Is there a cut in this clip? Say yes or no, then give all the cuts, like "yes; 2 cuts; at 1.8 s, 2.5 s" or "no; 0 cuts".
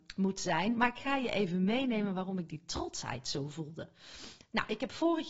no; 0 cuts